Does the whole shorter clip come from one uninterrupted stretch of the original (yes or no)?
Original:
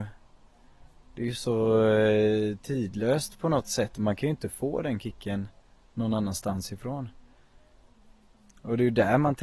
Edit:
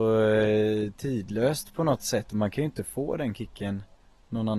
yes